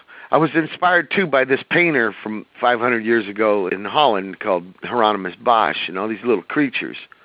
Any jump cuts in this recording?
yes; 1 cut; at 3.7 s

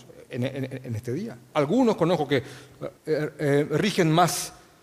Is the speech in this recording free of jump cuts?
no; 2 cuts; at 1.5 s, 3.0 s

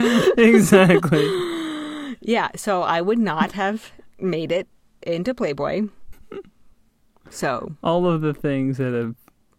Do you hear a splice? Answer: yes; 1 cut; at 6.1 s

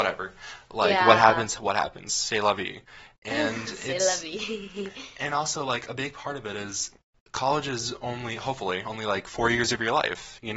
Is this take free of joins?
yes; 0 cuts

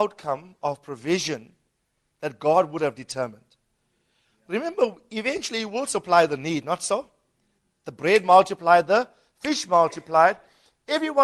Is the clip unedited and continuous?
yes; 0 cuts

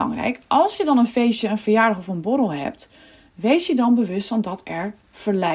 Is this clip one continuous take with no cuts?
yes; 0 cuts

